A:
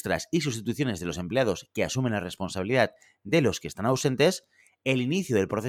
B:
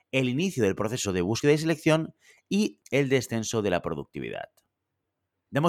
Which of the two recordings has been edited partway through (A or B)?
B